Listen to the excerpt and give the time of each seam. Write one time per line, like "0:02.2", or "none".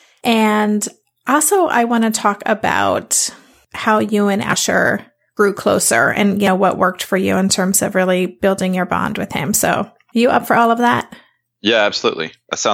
none